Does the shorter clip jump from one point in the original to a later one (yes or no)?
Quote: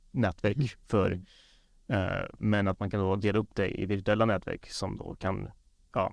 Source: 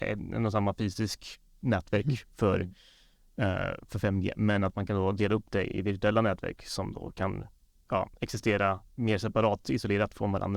yes